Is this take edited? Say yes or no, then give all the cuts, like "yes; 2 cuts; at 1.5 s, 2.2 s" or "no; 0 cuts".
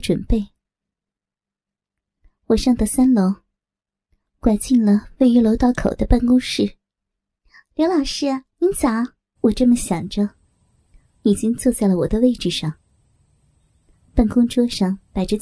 yes; 1 cut; at 9.4 s